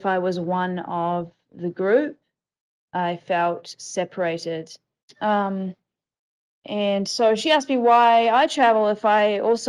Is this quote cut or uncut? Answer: cut